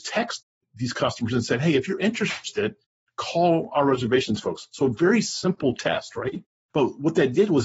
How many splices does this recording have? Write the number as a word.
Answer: zero